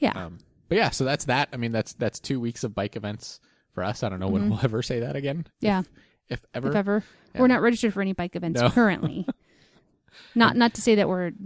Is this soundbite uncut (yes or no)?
yes